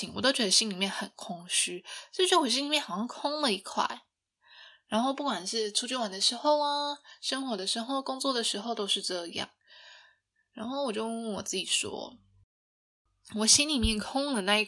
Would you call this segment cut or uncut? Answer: uncut